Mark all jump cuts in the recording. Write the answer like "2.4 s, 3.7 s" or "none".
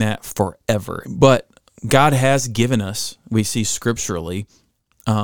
1.0 s

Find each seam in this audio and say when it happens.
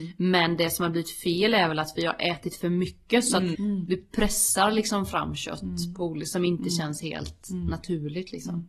3.5 s

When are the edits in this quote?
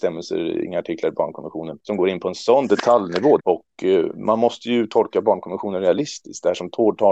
3.4 s

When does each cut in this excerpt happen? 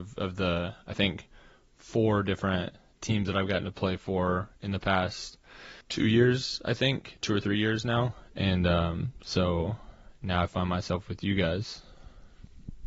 5.8 s

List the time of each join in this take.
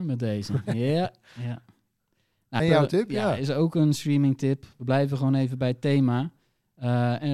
2.6 s

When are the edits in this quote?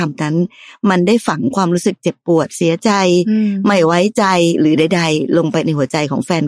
none

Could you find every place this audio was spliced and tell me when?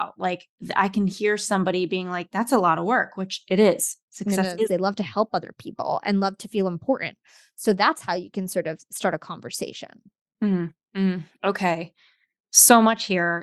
4.7 s

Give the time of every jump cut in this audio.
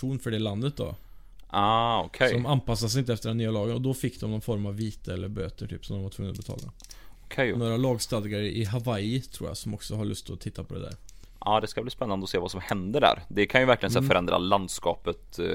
7.6 s

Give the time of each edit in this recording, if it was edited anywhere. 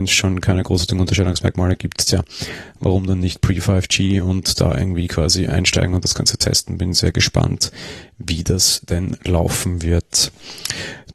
none

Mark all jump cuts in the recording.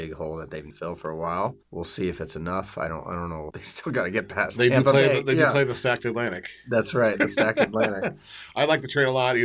none

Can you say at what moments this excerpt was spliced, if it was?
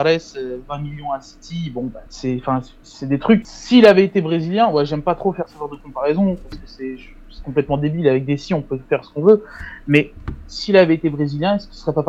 2.1 s, 3.4 s

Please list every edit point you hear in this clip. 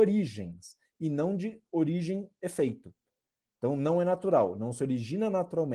none

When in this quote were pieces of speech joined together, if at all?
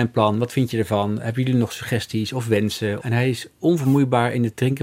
3.0 s

